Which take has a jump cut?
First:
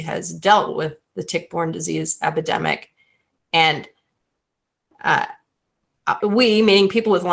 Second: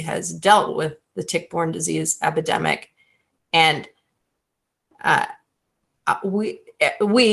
first; 1 cut; at 6.2 s

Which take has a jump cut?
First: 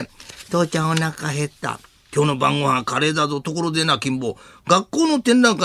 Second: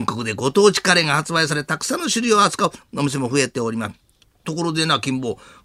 second; 1 cut; at 4.4 s

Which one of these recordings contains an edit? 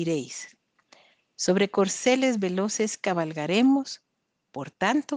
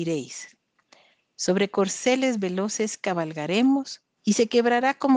second; 1 cut; at 4.2 s

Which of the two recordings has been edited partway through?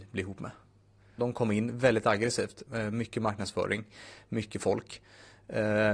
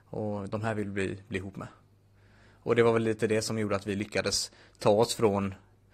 first; 1 cut; at 1.2 s

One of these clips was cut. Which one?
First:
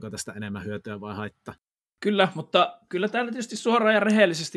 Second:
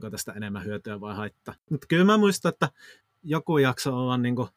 second; 1 cut; at 1.7 s

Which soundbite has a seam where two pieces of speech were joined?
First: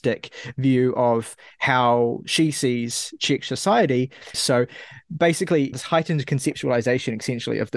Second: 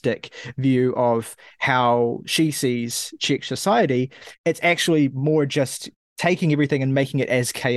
first; 2 cuts; at 4.3 s, 5.7 s

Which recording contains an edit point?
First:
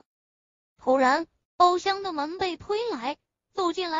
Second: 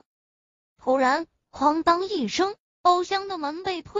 first; 1 cut; at 1.4 s

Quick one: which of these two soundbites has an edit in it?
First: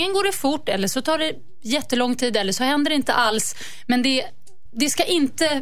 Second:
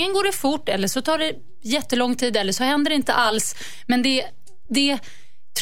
first; 1 cut; at 4.7 s

